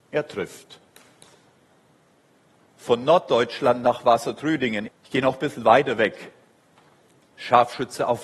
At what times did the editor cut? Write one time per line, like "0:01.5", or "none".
0:04.9